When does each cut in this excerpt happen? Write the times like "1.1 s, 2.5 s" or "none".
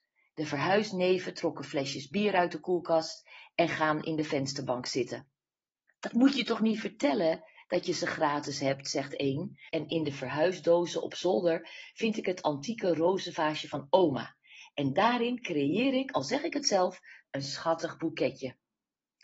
9.7 s

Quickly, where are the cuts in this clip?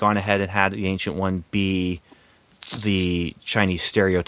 none

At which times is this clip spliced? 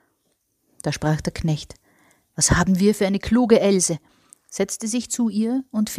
none

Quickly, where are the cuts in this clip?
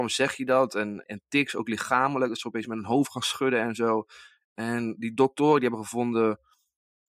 1.0 s

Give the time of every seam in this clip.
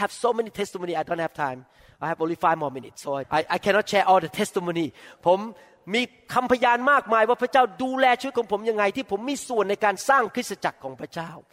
3.2 s

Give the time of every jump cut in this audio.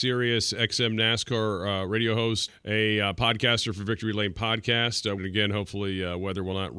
2.5 s, 5.2 s

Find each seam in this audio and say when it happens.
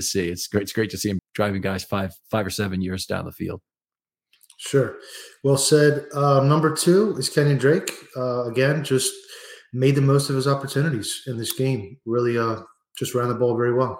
1.2 s

